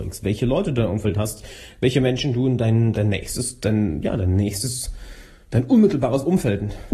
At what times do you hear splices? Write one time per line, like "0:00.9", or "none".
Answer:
0:02.9